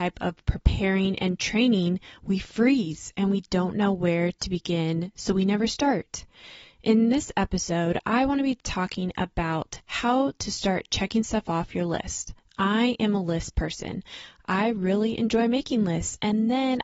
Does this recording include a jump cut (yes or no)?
no